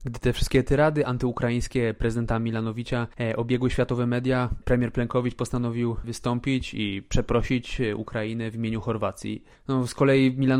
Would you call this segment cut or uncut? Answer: uncut